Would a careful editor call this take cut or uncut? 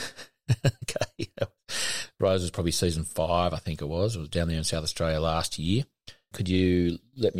cut